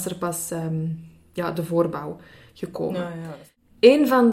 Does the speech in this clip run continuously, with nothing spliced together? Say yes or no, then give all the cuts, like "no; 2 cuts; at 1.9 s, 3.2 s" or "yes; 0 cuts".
yes; 0 cuts